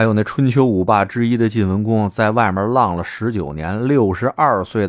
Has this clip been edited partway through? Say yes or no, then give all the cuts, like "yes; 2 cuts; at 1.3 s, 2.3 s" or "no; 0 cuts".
no; 0 cuts